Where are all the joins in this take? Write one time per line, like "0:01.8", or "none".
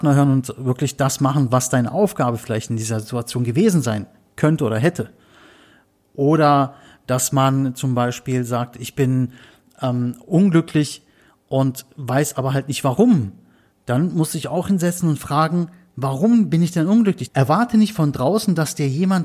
0:17.3